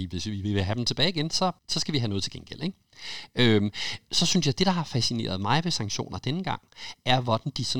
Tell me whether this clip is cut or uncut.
cut